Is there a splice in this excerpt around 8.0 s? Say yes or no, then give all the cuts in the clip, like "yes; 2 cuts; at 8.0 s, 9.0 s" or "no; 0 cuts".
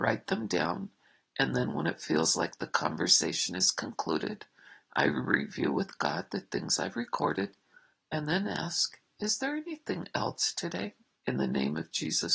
no; 1 cut; at 11.1 s